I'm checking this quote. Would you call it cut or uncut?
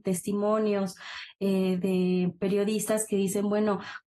cut